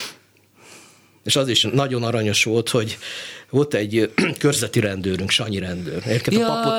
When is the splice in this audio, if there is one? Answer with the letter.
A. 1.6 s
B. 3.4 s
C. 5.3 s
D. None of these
A